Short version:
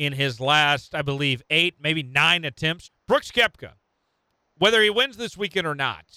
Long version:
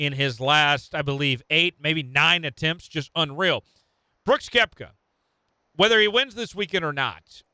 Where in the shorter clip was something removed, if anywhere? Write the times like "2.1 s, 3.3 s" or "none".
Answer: 2.9 s

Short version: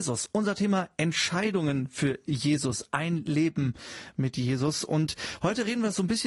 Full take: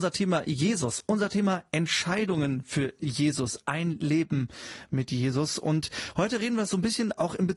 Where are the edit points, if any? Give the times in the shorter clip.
none

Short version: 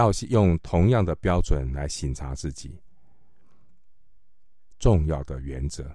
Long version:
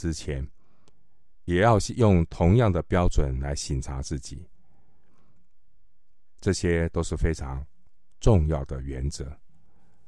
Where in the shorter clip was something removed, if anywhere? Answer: 4.7 s

